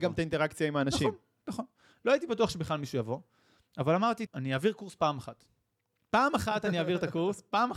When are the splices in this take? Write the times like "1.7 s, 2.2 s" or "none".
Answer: 4.3 s